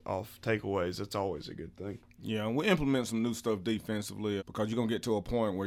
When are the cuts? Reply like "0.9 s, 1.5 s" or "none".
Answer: 4.4 s